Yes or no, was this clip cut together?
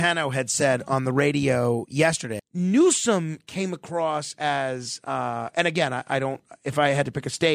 yes